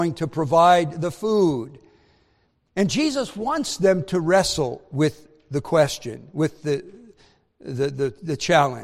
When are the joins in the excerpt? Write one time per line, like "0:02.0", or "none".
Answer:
none